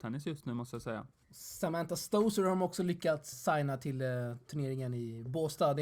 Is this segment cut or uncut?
cut